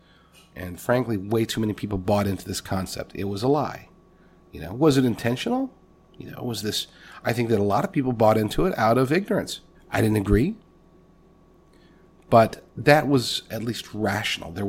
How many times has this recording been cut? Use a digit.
2